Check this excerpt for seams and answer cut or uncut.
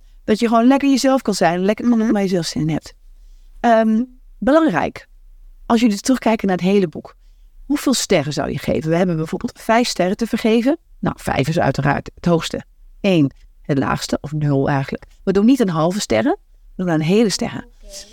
uncut